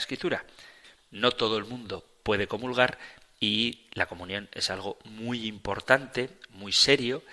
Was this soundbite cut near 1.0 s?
yes; 1 cut; at 1.0 s

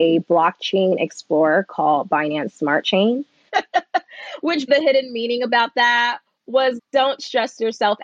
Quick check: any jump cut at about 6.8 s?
yes; 3 cuts; at 3.5 s, 4.7 s, 6.8 s

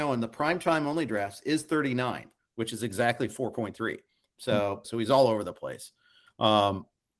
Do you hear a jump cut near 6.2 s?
no; 1 cut; at 4.8 s

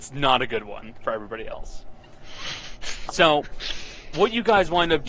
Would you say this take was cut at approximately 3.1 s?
yes; 2 cuts; at 3.1 s, 4.1 s

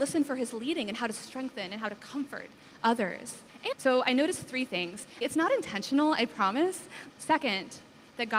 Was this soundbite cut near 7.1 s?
yes; 3 cuts; at 3.7 s, 5.2 s, 7.1 s

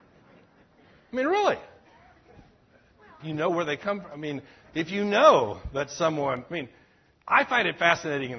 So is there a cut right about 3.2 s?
yes; 1 cut; at 3.2 s

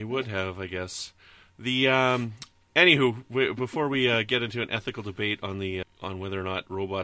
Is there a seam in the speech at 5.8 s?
yes; 1 cut; at 5.8 s

